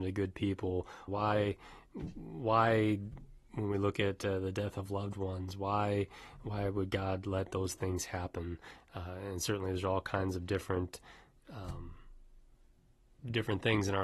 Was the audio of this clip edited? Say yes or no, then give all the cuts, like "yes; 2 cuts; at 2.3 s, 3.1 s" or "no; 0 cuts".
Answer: yes; 1 cut; at 1.1 s